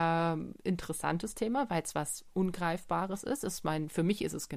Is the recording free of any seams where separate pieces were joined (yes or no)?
yes